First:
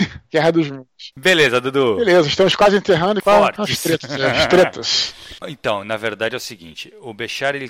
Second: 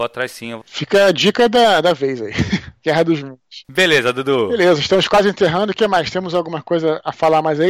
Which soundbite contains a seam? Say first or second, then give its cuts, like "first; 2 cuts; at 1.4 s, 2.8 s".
first; 2 cuts; at 3.2 s, 5.4 s